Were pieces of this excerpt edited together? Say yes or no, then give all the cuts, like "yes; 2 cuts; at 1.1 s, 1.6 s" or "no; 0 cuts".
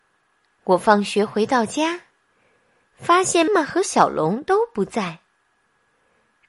yes; 1 cut; at 3.5 s